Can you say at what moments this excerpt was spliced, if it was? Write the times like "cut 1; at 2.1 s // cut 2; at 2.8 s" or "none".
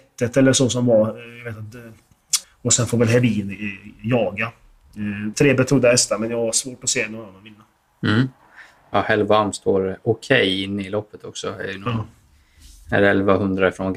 cut 1; at 2.4 s // cut 2; at 5.3 s

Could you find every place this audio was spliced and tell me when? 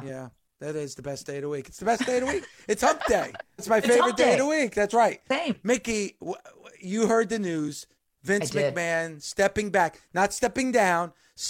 cut 1; at 3.6 s

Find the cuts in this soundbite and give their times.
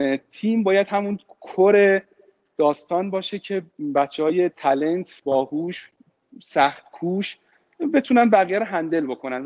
none

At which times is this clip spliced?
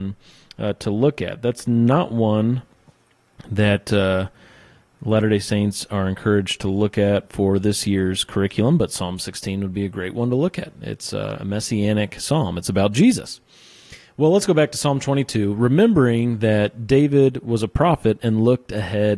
none

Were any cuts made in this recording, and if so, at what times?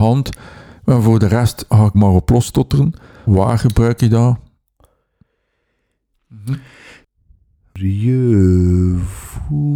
cut 1; at 1.9 s // cut 2; at 3.3 s // cut 3; at 6.1 s

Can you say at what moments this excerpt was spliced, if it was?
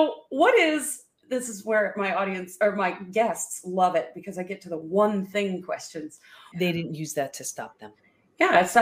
cut 1; at 6.5 s

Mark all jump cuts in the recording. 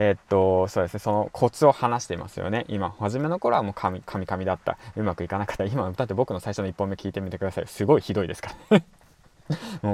none

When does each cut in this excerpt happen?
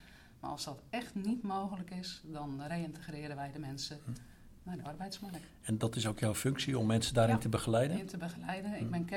none

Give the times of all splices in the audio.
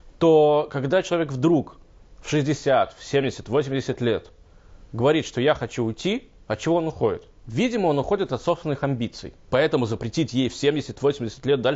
cut 1; at 4.8 s // cut 2; at 9.5 s

